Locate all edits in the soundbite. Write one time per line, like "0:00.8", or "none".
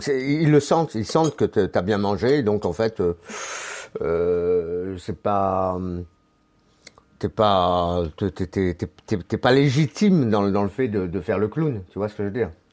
none